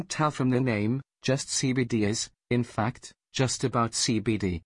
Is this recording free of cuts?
yes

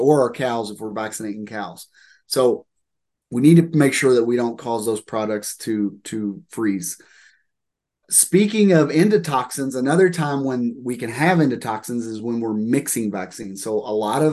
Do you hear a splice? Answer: no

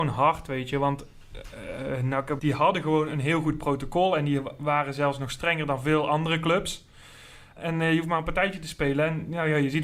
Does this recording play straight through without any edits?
no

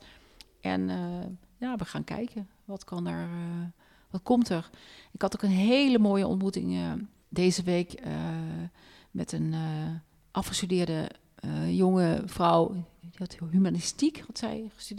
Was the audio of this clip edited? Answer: no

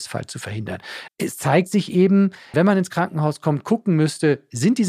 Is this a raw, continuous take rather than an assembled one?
no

